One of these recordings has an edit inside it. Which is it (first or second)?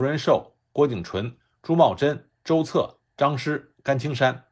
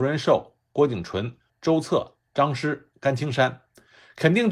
second